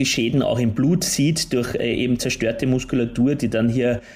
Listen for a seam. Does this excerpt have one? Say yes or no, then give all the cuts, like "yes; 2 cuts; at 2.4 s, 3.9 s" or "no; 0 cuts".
no; 0 cuts